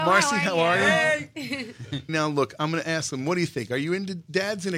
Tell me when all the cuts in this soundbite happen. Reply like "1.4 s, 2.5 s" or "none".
2.1 s

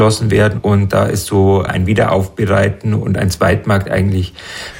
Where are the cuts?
1.7 s

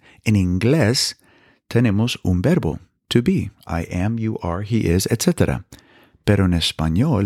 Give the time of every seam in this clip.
none

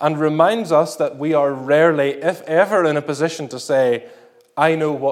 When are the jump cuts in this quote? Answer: none

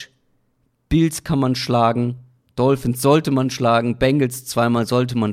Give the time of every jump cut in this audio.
none

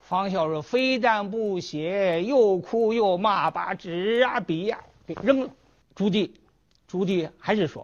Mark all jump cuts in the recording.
5.8 s

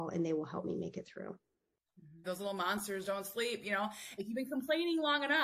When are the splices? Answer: 2.2 s, 4.2 s

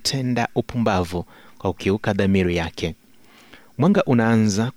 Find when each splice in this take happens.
none

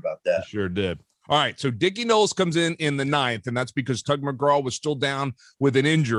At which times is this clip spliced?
none

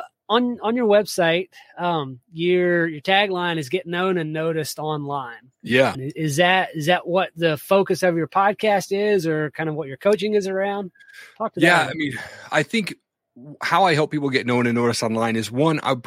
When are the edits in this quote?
5.9 s

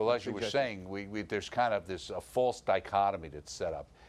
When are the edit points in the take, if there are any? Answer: 2.1 s

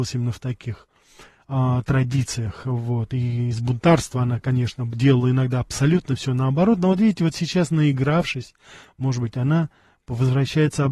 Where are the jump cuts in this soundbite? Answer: none

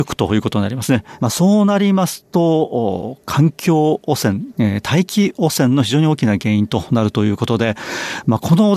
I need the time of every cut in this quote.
1.2 s

